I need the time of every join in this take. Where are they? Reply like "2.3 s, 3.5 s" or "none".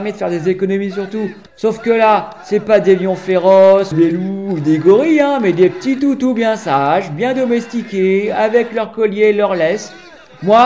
1.5 s, 3.9 s